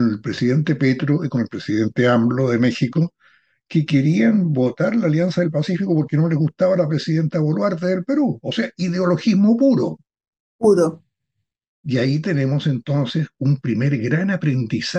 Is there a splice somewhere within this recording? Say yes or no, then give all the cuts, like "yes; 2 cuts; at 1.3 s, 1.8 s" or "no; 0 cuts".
no; 0 cuts